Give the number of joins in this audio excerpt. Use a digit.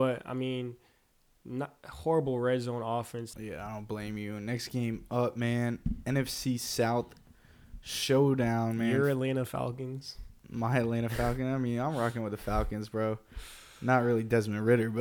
1